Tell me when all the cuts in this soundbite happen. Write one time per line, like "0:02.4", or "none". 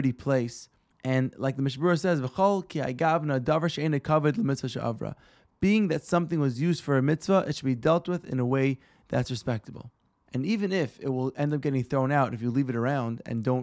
none